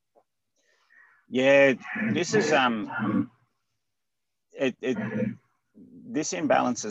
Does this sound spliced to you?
no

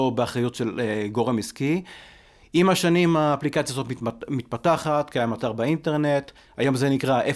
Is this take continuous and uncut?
yes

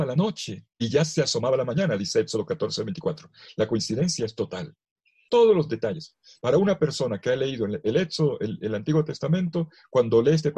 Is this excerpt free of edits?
no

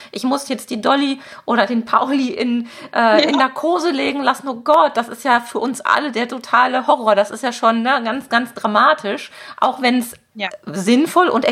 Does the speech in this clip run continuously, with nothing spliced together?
yes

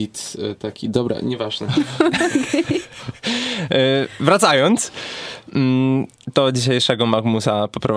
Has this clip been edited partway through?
no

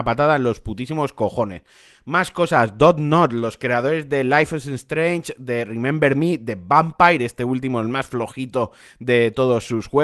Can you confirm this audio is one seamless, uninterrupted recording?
yes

